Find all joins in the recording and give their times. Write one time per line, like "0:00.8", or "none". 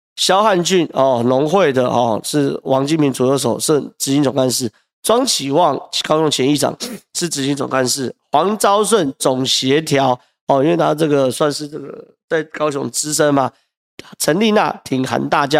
none